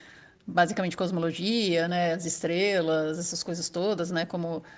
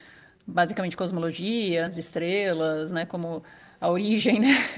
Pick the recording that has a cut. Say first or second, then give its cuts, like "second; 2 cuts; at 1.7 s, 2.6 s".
second; 2 cuts; at 1.9 s, 2.9 s